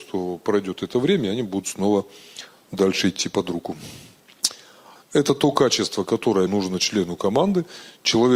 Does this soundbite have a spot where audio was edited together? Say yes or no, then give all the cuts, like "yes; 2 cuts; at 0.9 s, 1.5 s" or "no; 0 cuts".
yes; 2 cuts; at 5.0 s, 6.5 s